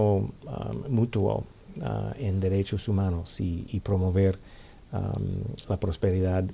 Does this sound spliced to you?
no; 0 cuts

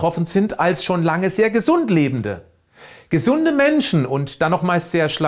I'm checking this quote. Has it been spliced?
no; 0 cuts

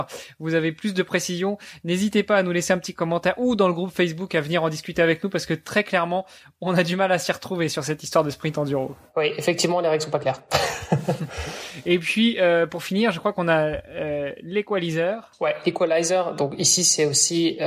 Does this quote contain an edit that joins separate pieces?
no; 0 cuts

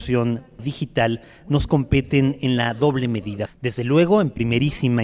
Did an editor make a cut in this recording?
yes; 1 cut; at 3.5 s

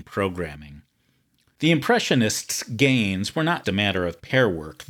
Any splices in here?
yes; 1 cut; at 3.6 s

